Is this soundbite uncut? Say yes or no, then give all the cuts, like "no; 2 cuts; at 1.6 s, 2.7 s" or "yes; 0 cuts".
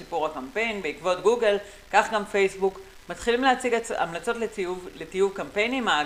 yes; 0 cuts